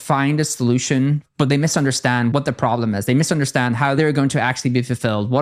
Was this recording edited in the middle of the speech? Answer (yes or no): no